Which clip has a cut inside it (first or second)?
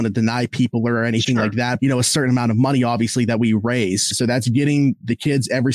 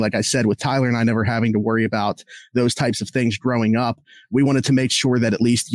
first